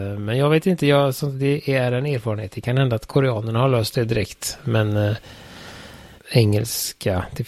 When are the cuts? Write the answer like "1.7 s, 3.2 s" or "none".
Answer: 6.2 s